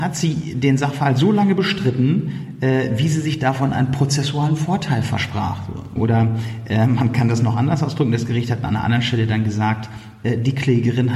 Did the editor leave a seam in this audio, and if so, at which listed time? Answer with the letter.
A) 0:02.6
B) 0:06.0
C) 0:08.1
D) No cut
B